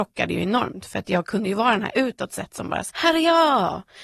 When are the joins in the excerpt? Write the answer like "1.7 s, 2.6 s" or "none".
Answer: 2.9 s